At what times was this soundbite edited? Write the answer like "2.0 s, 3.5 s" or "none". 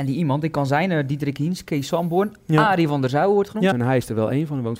3.7 s